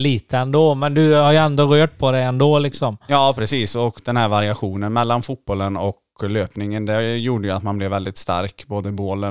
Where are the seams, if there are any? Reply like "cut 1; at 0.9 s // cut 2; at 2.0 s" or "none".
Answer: none